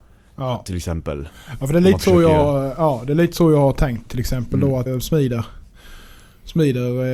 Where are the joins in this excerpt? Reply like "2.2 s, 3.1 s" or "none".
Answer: 4.9 s